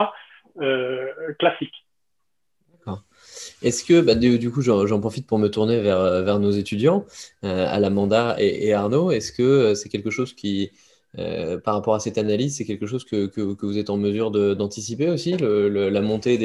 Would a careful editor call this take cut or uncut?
uncut